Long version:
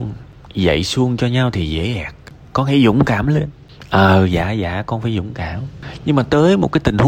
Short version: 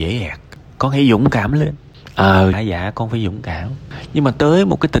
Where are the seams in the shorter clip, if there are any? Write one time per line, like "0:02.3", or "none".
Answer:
0:02.5